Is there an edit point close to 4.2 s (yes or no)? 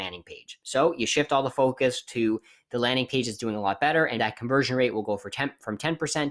yes